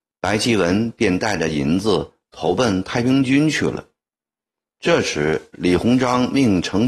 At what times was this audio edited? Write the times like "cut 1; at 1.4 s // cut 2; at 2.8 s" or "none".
cut 1; at 4.6 s